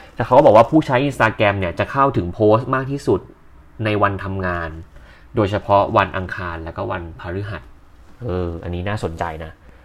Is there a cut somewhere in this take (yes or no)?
no